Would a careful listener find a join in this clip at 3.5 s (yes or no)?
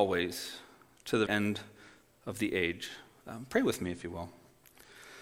no